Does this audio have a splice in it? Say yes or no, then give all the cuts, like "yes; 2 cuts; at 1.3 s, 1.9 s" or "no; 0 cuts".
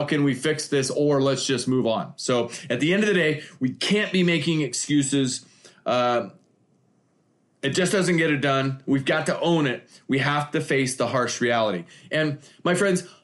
no; 0 cuts